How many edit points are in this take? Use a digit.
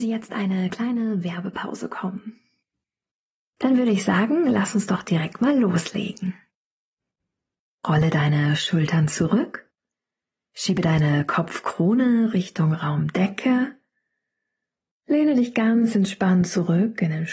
0